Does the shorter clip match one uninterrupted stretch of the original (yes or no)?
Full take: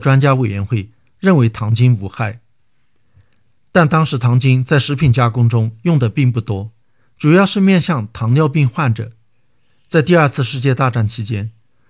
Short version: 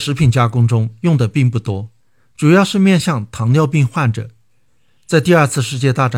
yes